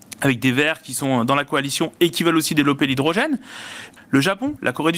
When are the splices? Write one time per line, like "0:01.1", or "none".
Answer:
0:04.0